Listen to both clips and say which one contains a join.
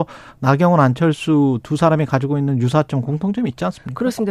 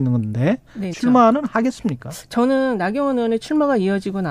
second; 1 cut; at 0.9 s

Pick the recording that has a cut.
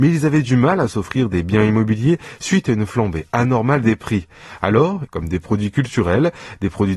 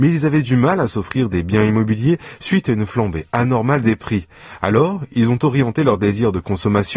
first; 1 cut; at 5.1 s

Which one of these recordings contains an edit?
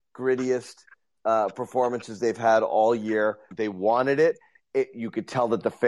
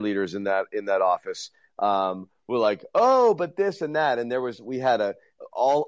first; 1 cut; at 3.5 s

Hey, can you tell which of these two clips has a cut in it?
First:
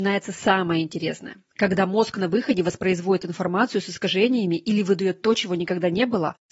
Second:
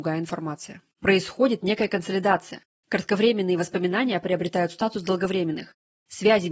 second; 1 cut; at 1.0 s

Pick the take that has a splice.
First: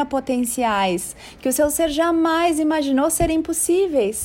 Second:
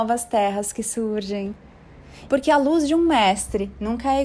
second; 1 cut; at 2.3 s

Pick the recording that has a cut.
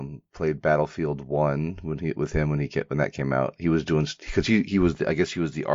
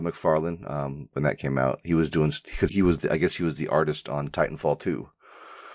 second; 2 cuts; at 1.1 s, 2.7 s

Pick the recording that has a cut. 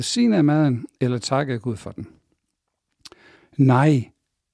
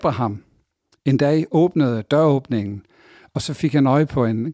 first; 1 cut; at 3.4 s

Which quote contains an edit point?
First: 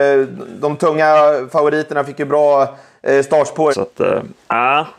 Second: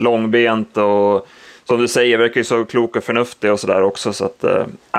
first; 1 cut; at 3.7 s

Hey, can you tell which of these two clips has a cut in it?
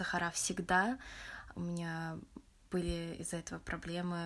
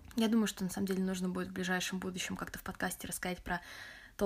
first; 1 cut; at 1.5 s

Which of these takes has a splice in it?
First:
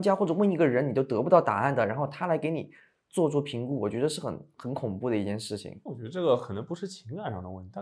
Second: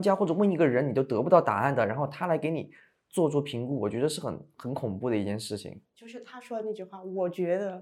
first; 1 cut; at 5.9 s

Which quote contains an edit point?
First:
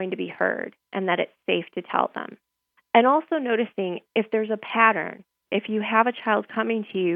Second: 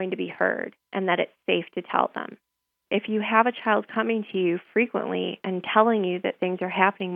second; 1 cut; at 2.7 s

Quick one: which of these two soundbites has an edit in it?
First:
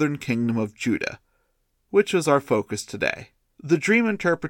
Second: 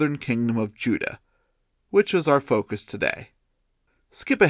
first; 1 cut; at 3.6 s

